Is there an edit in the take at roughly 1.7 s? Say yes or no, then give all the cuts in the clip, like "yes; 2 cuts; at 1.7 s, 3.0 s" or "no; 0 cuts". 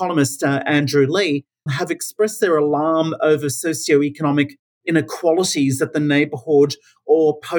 yes; 1 cut; at 1.7 s